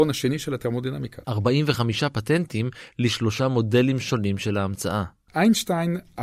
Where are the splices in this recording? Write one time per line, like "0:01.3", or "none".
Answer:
0:01.2